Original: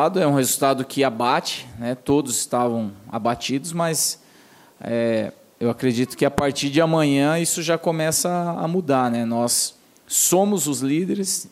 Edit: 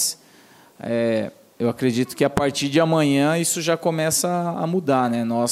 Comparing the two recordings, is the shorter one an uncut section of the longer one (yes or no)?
yes